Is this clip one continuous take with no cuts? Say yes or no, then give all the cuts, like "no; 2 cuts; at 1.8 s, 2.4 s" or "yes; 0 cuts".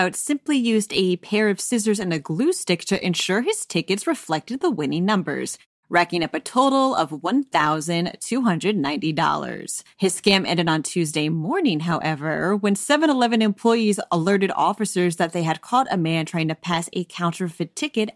yes; 0 cuts